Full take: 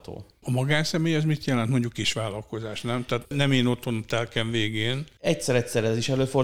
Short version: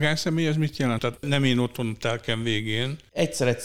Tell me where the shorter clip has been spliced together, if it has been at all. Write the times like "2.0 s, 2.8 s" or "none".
1.0 s